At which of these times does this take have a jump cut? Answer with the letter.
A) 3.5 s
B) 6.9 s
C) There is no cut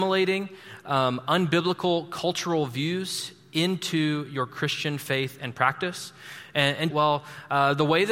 B